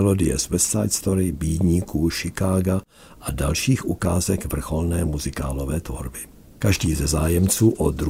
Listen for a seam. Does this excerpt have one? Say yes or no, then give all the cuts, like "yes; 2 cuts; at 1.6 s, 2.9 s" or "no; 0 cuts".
no; 0 cuts